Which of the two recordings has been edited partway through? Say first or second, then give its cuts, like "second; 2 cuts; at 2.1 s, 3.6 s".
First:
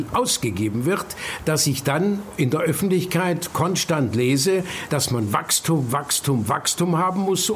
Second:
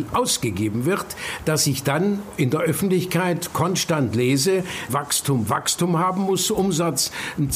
second; 1 cut; at 4.9 s